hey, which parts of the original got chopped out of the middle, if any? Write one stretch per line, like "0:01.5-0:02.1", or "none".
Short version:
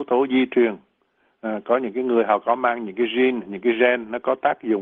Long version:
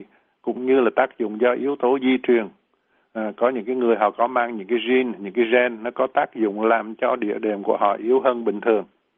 none